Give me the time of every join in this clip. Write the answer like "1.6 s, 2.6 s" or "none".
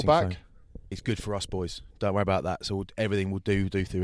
0.9 s